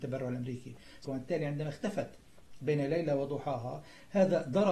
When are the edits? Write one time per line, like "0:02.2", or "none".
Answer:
0:01.0